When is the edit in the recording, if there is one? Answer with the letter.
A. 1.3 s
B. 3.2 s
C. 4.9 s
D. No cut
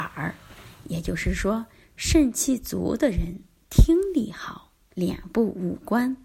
C